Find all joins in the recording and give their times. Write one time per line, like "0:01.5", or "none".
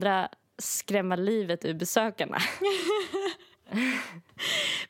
none